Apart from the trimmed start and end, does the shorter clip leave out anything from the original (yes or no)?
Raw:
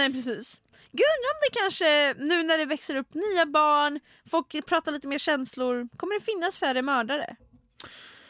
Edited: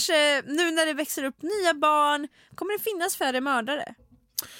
yes